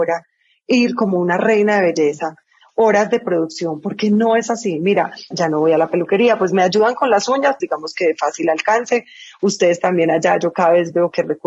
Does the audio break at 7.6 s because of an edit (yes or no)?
yes